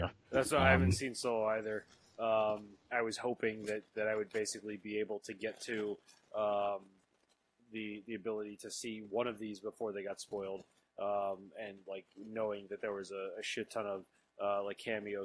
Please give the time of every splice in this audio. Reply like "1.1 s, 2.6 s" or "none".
2.9 s